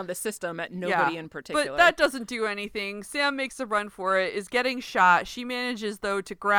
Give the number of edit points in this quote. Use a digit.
0